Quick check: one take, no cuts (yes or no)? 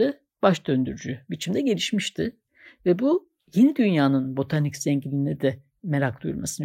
yes